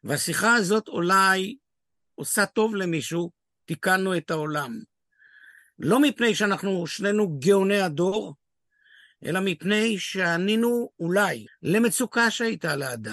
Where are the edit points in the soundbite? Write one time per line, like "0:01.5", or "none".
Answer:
0:11.5